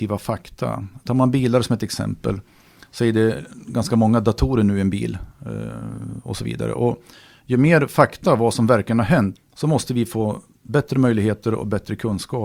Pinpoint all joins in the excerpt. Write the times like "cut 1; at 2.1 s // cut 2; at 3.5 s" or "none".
cut 1; at 9.4 s